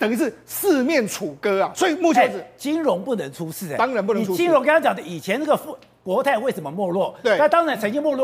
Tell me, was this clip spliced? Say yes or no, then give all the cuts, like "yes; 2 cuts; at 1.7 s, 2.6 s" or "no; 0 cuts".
no; 0 cuts